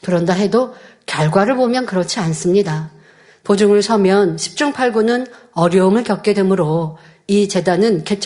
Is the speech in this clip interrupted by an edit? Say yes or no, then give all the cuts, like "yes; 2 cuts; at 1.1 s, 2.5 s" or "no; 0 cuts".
yes; 1 cut; at 3.4 s